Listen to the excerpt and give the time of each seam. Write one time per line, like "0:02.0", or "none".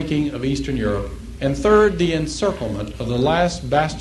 0:01.4

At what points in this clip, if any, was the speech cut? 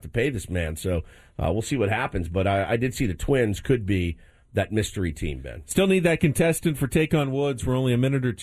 none

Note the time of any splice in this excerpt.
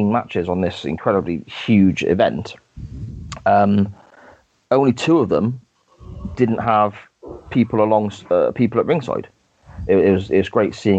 0:09.9

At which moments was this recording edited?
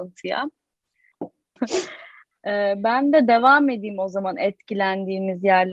0:01.6

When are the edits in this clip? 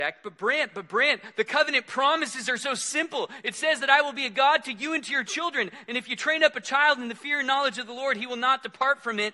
none

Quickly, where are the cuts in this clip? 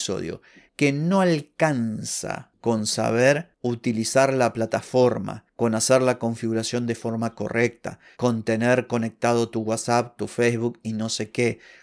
0:08.1
0:10.2

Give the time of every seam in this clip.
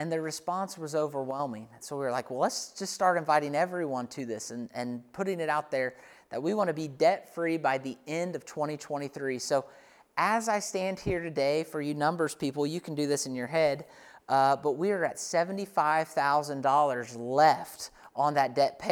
none

